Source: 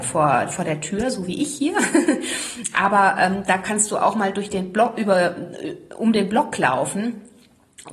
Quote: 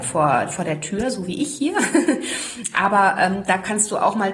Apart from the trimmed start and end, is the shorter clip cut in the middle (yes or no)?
no